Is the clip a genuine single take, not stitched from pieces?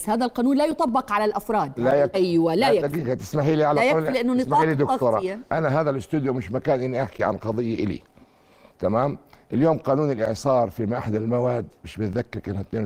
no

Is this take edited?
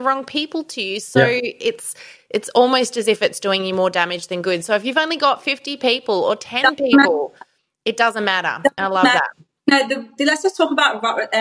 no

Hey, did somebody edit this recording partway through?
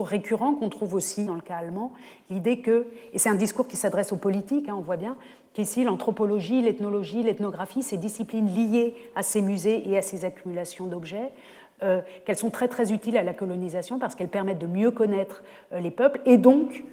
yes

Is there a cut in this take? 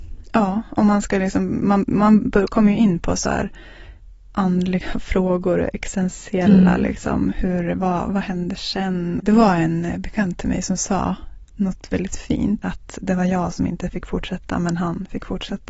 yes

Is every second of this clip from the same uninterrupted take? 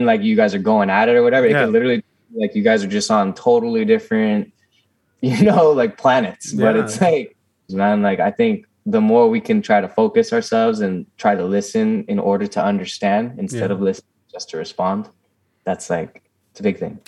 no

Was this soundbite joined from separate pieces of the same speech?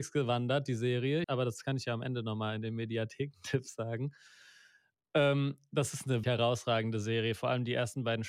yes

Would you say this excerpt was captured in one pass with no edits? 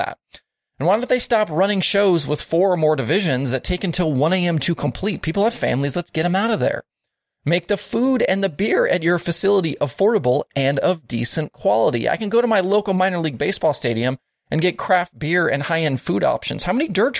yes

